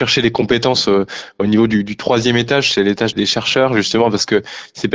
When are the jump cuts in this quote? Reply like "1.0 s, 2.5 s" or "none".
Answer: 3.1 s